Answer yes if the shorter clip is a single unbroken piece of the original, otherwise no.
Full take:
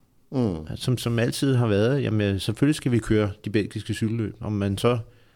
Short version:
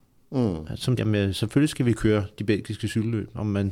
no